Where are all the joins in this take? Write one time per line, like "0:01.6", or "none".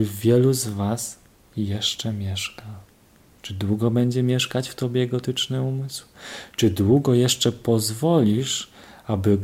0:03.4